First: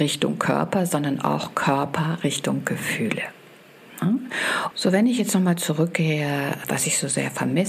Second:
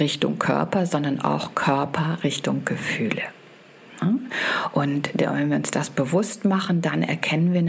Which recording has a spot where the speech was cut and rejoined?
first; 2 cuts; at 4.7 s, 6.6 s

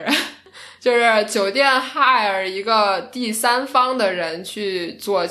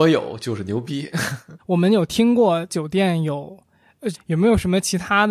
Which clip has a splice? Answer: second; 2 cuts; at 1.6 s, 4.1 s

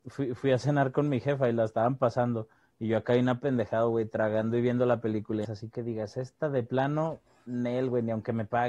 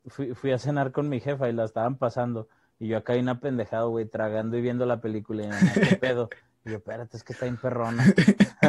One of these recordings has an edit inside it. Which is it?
first; 1 cut; at 5.4 s

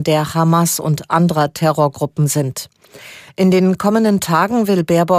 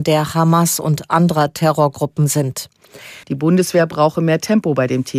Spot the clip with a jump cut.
second; 1 cut; at 3.2 s

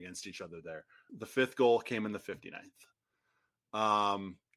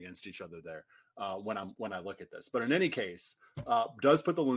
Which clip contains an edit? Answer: first; 1 cut; at 1.1 s

